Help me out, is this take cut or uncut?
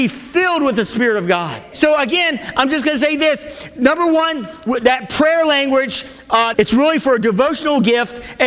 cut